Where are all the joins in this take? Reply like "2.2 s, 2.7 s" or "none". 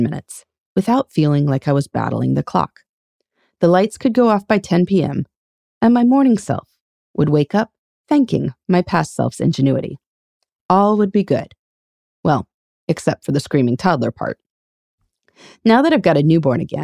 none